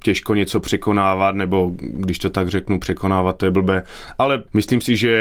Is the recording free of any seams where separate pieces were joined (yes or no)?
yes